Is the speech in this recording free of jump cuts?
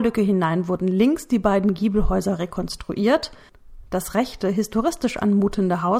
yes; 0 cuts

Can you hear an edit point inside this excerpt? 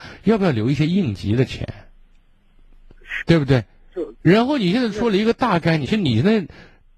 yes; 2 cuts; at 3.2 s, 5.9 s

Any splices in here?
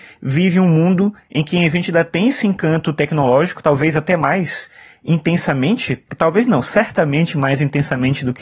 no; 0 cuts

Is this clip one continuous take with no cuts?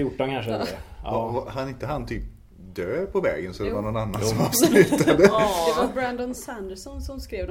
yes; 0 cuts

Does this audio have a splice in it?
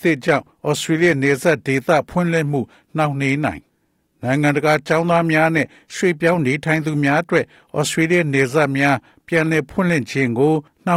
no; 0 cuts

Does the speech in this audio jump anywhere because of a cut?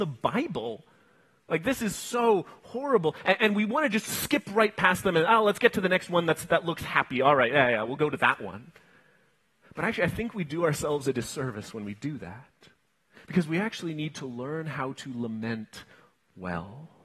no; 0 cuts

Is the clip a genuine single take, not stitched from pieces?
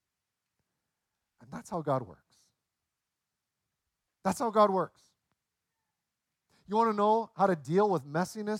yes; 0 cuts

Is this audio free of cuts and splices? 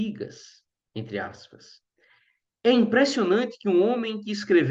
yes; 0 cuts

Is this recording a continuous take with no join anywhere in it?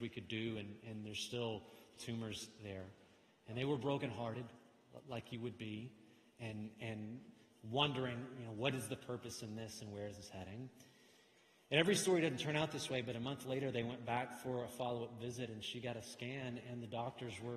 no; 1 cut; at 2.0 s

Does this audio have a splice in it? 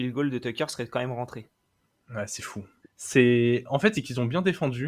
yes; 2 cuts; at 2.8 s, 3.9 s

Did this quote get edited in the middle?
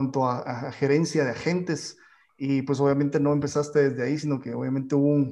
no; 0 cuts

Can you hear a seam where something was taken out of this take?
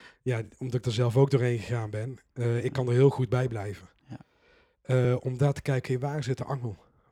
no; 0 cuts

